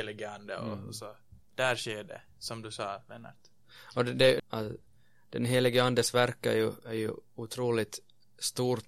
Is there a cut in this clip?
yes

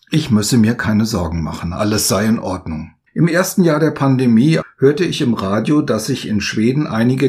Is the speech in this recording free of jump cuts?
no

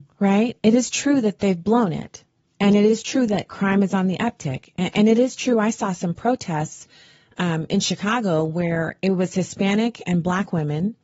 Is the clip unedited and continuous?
yes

